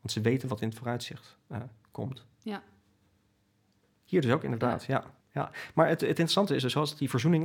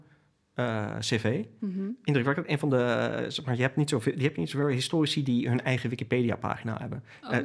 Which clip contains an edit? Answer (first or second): first